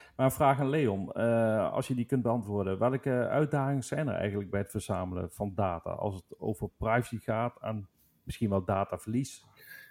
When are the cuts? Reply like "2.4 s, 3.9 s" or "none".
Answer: none